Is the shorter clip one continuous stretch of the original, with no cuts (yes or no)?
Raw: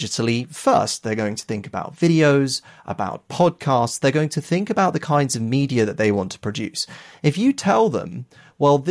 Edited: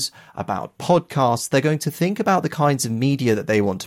yes